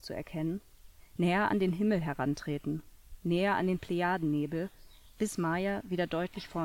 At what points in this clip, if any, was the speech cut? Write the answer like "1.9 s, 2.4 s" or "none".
none